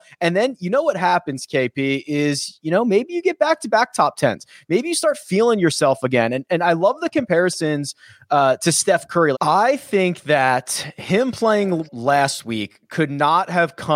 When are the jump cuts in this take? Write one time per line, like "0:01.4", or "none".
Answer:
0:09.3
0:11.9